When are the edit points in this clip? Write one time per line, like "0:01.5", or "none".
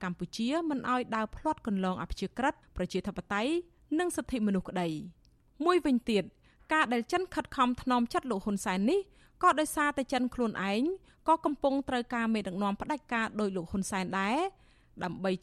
none